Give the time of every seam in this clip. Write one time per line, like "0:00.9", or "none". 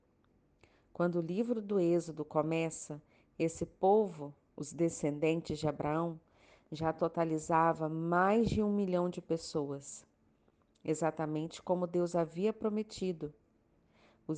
none